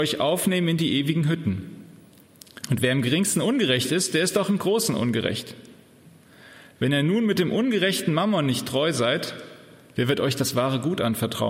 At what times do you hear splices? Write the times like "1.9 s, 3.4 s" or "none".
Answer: 2.6 s